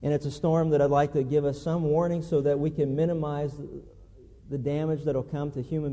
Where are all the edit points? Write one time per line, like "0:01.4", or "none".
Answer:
none